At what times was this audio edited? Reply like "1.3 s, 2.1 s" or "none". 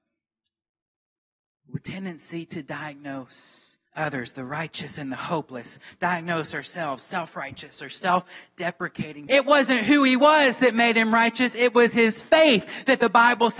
3.9 s, 9.3 s